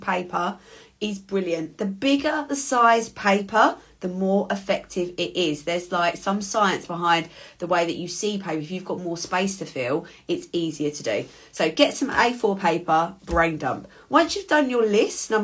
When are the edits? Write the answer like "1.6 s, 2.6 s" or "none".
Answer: none